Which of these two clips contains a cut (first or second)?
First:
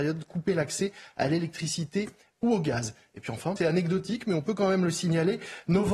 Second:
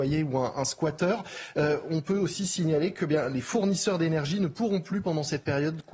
first